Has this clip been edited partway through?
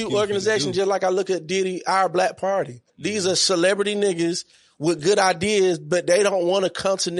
yes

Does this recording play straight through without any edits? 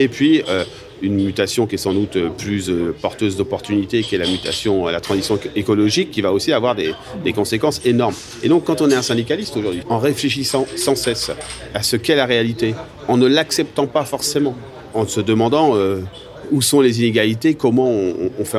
no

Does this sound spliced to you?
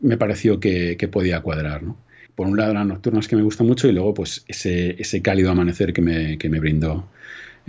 yes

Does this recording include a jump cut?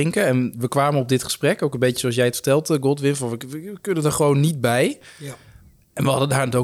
no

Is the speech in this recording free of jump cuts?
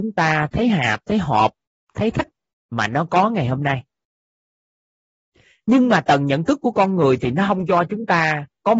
yes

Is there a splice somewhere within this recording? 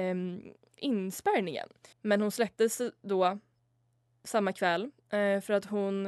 yes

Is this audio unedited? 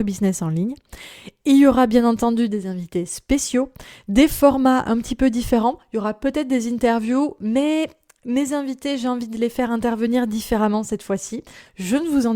yes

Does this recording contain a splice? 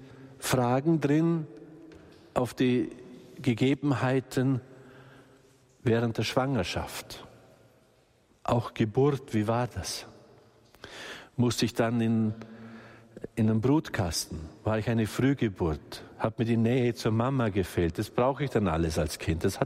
no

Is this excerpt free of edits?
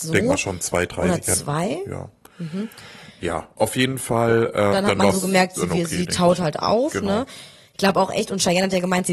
no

